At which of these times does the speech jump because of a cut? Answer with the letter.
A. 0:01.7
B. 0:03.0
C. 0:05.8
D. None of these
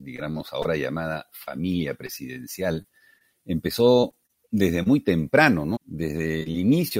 C